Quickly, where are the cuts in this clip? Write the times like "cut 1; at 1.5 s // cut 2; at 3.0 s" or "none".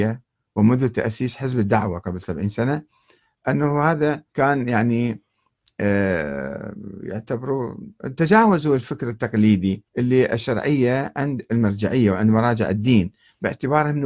cut 1; at 4.3 s // cut 2; at 9.9 s